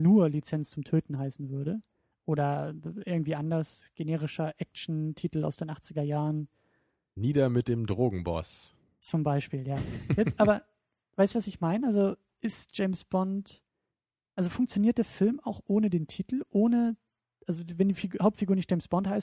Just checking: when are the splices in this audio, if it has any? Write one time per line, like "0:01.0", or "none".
none